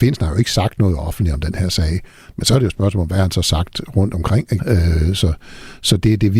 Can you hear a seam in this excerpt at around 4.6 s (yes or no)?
yes